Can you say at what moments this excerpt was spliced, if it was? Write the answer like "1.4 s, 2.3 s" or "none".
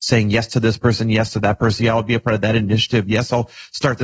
1.8 s